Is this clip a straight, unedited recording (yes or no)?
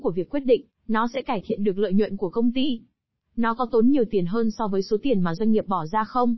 yes